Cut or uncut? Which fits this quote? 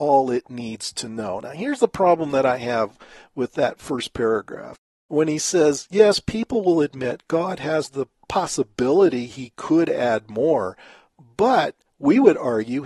uncut